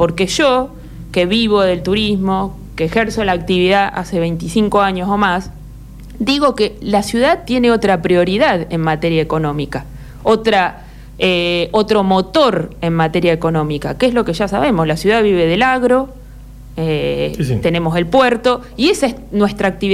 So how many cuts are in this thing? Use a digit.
0